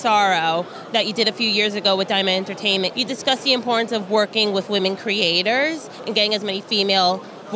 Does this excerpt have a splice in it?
yes; 1 cut; at 2.9 s

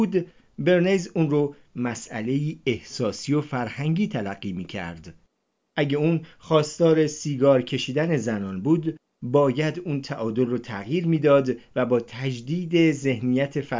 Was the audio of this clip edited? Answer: no; 0 cuts

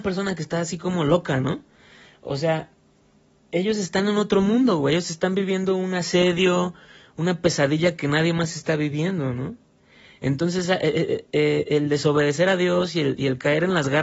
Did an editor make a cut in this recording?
no; 0 cuts

